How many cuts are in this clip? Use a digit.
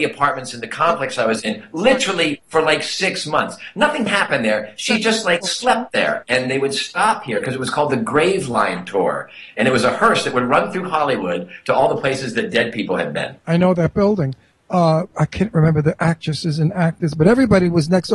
2